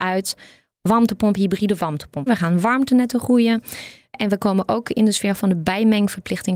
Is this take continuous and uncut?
no; 2 cuts; at 2.3 s, 4.1 s

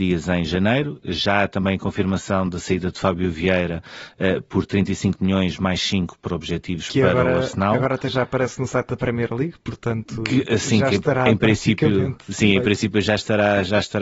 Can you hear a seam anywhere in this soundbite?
no; 0 cuts

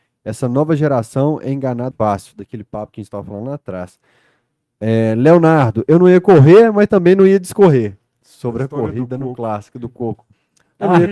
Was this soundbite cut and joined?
yes; 1 cut; at 1.9 s

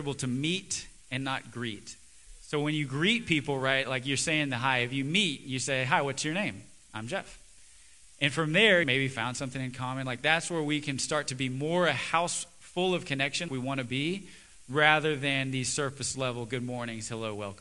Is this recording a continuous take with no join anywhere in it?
no; 2 cuts; at 8.8 s, 13.5 s

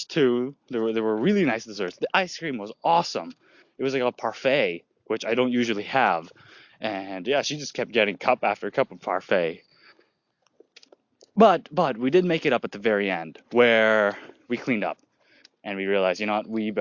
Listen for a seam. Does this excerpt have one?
no; 0 cuts

